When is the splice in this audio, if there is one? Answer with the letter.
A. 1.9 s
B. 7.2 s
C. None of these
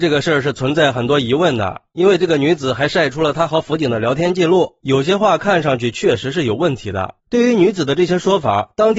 B